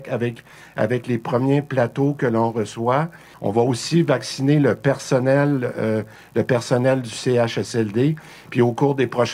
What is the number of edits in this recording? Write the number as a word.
one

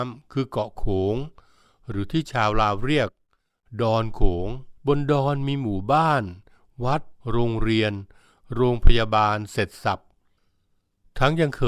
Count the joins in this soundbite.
two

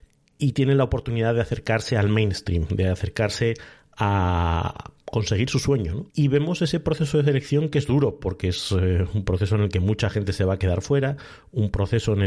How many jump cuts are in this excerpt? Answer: one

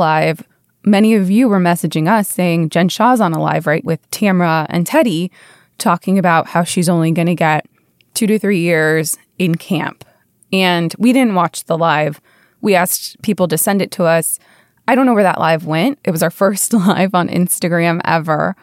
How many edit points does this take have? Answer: two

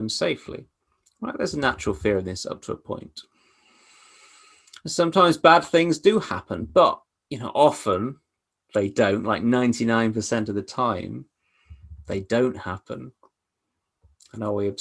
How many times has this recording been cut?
zero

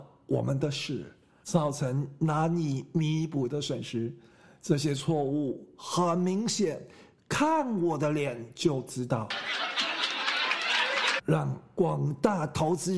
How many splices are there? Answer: two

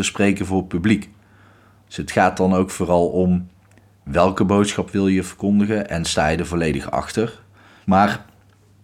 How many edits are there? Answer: one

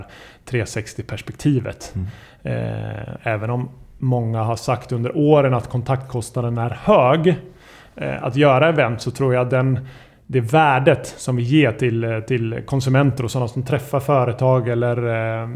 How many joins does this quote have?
zero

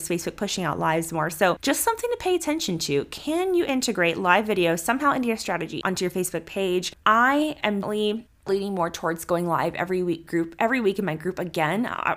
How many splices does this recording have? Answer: two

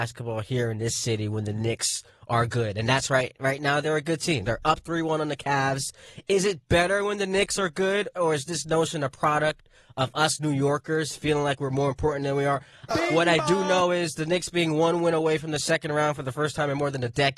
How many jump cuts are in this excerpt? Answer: two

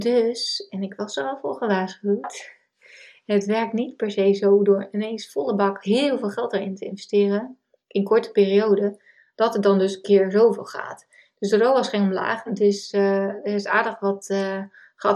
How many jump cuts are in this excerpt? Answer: one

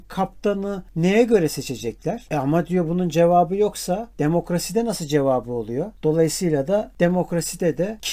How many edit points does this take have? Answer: one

